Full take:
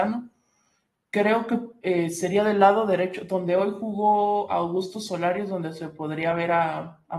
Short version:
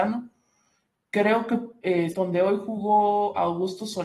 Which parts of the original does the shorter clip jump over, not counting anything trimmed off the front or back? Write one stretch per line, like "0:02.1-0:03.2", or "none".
0:02.1-0:03.3